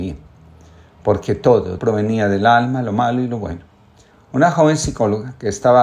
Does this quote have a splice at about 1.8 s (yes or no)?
yes